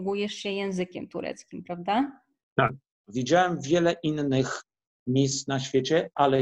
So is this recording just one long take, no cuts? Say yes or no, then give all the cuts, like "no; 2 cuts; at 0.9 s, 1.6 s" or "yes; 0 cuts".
no; 1 cut; at 3.0 s